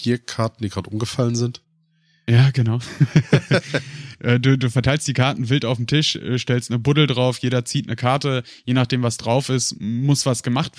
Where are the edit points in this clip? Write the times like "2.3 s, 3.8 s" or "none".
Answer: none